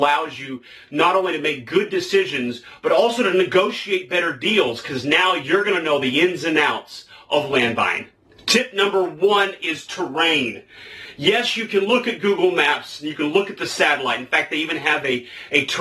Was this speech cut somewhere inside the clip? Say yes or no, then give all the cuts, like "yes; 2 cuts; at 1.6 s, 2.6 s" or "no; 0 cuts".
no; 0 cuts